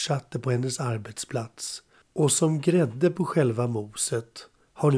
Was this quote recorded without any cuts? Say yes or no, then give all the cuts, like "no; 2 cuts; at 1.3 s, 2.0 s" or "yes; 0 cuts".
yes; 0 cuts